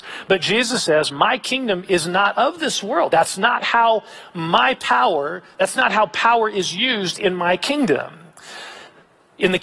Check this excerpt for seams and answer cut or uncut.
uncut